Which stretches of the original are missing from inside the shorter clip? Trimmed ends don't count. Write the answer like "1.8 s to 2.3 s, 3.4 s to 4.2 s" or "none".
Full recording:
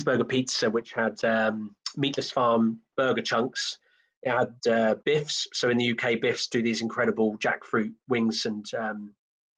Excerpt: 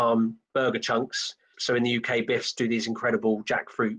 4.0 s to 5.5 s